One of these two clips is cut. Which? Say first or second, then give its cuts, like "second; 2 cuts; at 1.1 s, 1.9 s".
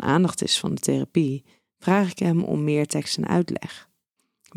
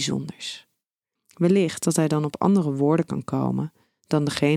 second; 1 cut; at 1.2 s